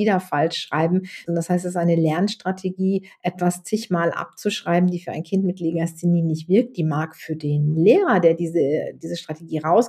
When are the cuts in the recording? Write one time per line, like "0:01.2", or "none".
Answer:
0:01.3

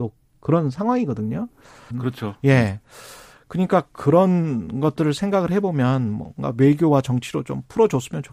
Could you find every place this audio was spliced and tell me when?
0:01.9

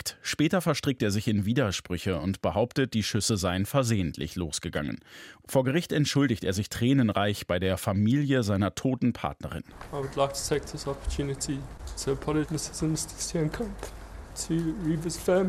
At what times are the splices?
0:05.4
0:12.4

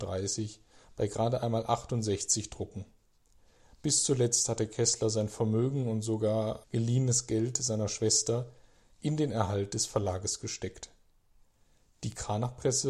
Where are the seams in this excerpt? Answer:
0:06.6

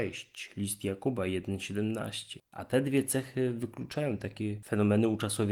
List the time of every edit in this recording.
0:02.5

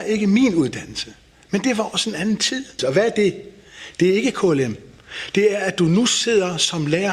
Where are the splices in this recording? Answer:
0:02.8

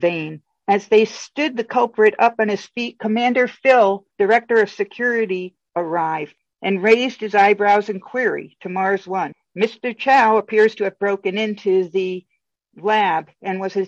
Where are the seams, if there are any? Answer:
0:04.1

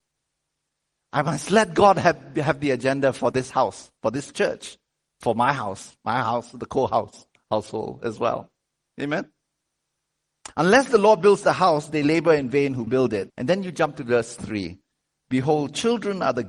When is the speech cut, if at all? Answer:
0:13.3

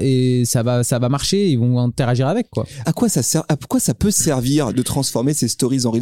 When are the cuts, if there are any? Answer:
0:02.8
0:04.7

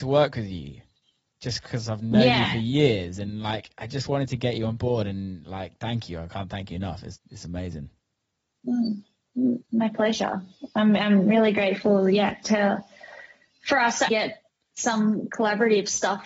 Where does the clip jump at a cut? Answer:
0:14.1

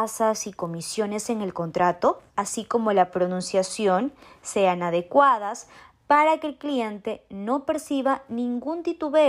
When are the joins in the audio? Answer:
0:02.3

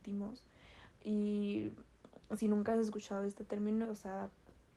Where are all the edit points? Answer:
0:00.9
0:03.8

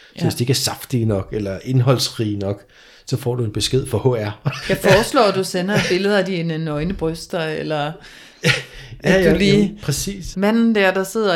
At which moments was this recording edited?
0:04.6
0:10.3

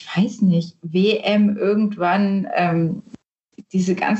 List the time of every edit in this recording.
none

